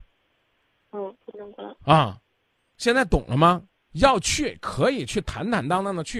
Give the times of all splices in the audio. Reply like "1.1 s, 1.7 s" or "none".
3.7 s